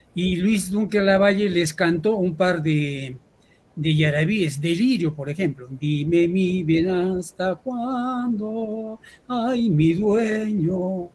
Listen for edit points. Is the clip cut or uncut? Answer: uncut